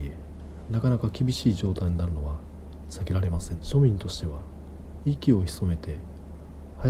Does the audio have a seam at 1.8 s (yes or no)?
no